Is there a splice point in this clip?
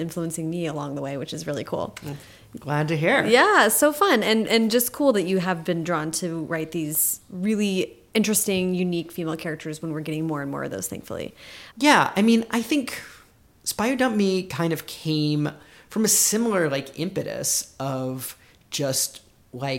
yes; 1 cut; at 11.7 s

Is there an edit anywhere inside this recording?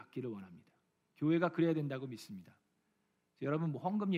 no; 0 cuts

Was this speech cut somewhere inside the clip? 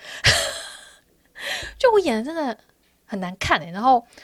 no; 0 cuts

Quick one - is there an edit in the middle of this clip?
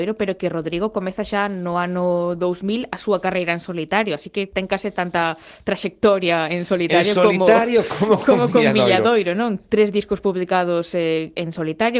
no; 0 cuts

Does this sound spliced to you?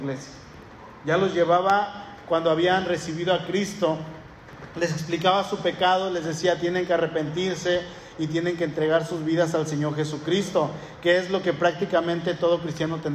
no; 0 cuts

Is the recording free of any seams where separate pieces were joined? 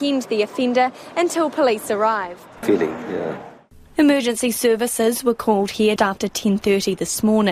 no; 2 cuts; at 2.6 s, 6.0 s

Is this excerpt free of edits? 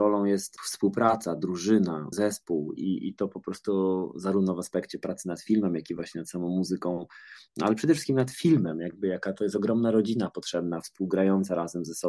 yes; 0 cuts

